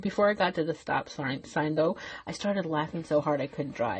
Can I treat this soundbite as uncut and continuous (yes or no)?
yes